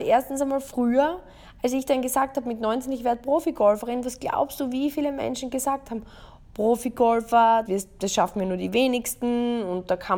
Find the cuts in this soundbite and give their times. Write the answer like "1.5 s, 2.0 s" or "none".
6.5 s, 7.7 s